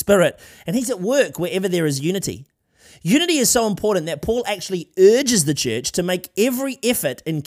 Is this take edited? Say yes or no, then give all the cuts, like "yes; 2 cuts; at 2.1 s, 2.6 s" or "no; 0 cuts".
no; 0 cuts